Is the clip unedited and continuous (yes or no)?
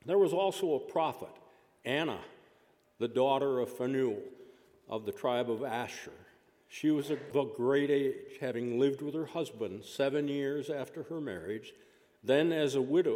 yes